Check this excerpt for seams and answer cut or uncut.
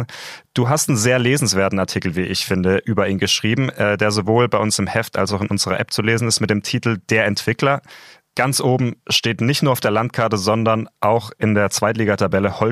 cut